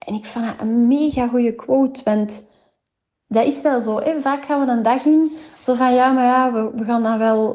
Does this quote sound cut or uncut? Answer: uncut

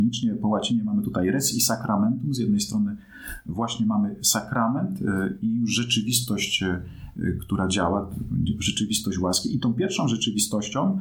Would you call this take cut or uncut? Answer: uncut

